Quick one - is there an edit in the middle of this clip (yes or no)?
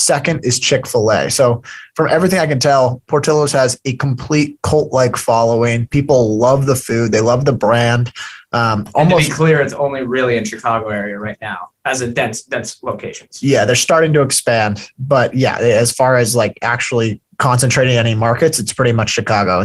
yes